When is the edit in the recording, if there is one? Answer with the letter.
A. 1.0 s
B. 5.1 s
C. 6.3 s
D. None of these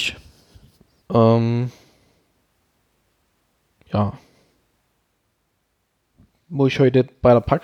A